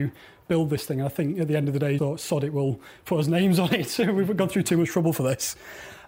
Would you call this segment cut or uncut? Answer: cut